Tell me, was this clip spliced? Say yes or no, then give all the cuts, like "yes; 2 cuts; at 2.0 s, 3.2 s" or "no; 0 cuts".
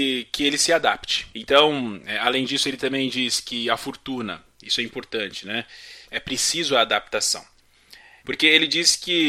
yes; 3 cuts; at 1.3 s, 6.0 s, 8.2 s